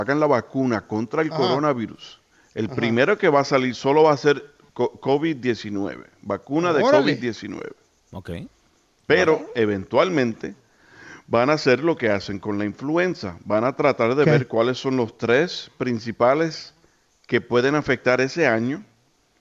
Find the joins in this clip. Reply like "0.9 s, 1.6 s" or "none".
none